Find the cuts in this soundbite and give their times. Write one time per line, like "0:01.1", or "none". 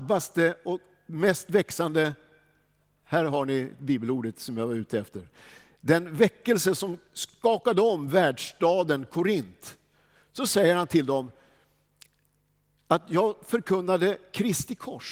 none